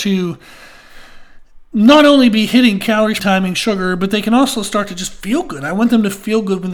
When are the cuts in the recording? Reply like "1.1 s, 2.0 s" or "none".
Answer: 3.2 s